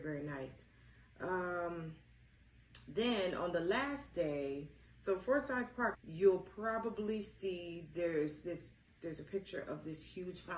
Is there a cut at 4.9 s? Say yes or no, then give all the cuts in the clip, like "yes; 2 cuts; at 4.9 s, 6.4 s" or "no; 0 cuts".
yes; 2 cuts; at 4.9 s, 5.9 s